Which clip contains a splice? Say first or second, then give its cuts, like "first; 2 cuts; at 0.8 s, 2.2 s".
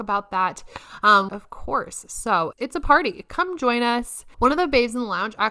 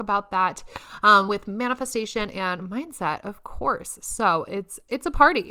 first; 3 cuts; at 1.3 s, 2.5 s, 4.3 s